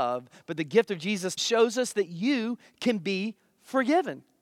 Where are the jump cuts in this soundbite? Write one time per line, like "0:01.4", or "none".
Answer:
0:01.4